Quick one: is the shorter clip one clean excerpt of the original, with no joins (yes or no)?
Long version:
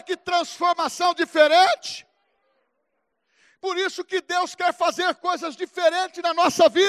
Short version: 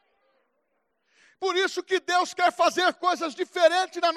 yes